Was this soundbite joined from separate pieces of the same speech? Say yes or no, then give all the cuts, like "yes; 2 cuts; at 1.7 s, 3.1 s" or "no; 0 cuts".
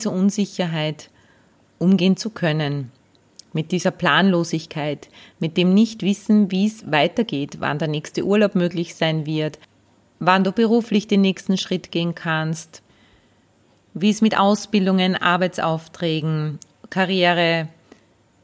no; 0 cuts